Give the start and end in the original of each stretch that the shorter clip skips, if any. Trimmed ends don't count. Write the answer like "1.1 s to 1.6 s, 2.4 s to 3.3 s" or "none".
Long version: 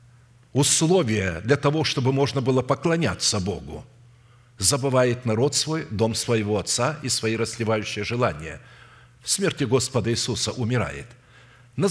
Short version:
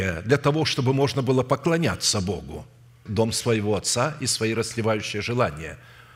4.2 s to 5.9 s

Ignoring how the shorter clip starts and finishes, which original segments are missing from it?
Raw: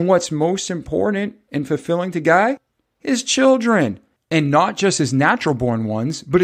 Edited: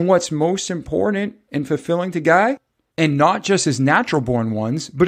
2.9 s to 4.2 s

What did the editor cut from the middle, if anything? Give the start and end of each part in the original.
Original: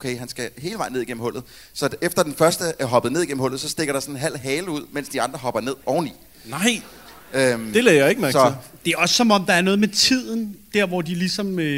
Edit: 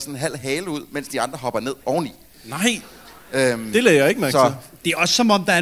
none

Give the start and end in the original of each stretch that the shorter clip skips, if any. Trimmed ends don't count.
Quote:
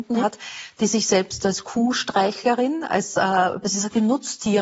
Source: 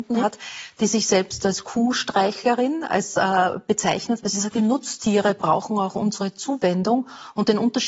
3.6 s to 4.2 s

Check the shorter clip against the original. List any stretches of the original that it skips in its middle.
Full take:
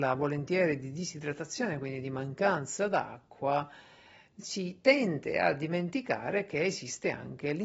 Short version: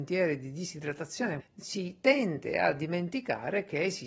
1.8 s to 4.2 s

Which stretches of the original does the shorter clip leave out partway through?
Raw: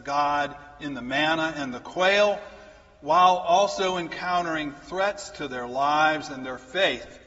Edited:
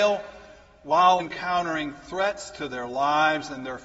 3.4 s to 4.0 s

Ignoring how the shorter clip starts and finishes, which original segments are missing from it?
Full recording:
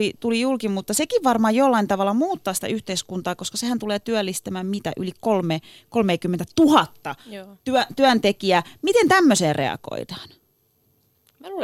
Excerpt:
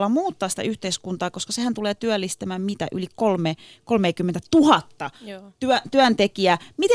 none

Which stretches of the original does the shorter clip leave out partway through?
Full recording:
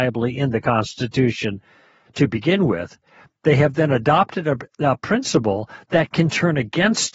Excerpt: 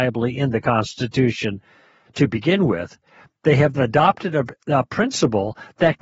3.7 s to 3.9 s

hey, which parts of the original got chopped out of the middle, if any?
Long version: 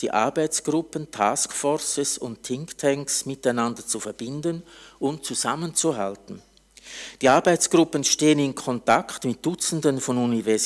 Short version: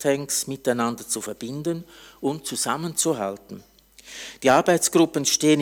none

